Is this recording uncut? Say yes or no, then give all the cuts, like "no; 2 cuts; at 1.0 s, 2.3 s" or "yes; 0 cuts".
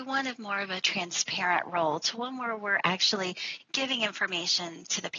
yes; 0 cuts